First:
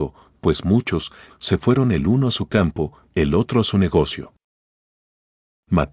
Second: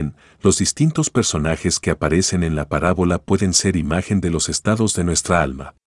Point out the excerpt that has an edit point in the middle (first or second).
first